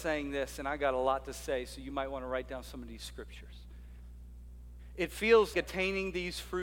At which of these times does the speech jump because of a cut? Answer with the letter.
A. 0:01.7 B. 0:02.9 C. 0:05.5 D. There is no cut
C